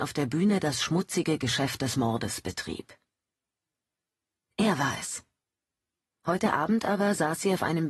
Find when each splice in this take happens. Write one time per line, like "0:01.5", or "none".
0:06.1